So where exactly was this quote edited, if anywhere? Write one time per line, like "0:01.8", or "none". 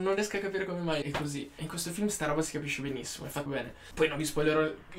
0:01.0
0:03.5